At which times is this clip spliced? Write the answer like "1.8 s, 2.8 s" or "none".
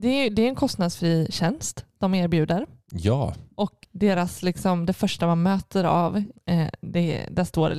3.8 s, 6.3 s